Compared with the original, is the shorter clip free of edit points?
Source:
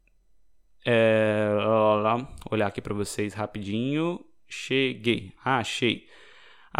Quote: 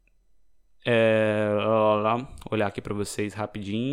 yes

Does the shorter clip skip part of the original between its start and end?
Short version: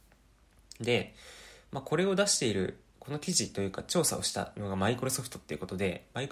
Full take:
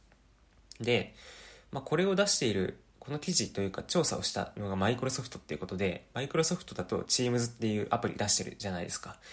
no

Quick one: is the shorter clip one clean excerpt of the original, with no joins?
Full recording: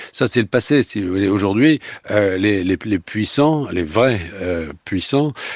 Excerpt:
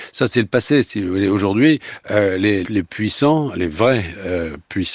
no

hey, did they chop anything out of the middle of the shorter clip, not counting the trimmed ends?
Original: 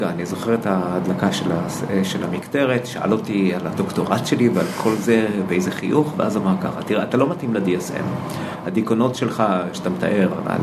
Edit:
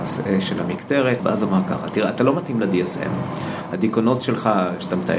yes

